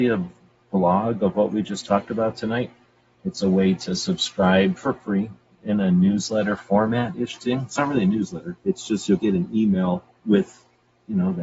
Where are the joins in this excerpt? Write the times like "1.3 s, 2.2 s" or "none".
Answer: none